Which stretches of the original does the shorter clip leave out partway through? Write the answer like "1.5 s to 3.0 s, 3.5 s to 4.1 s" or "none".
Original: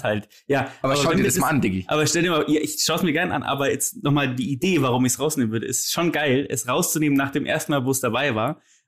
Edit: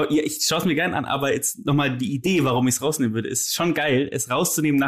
none